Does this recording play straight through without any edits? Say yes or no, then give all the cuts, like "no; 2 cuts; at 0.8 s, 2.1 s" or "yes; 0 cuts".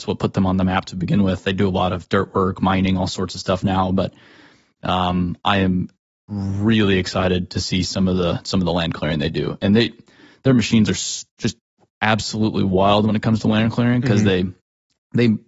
yes; 0 cuts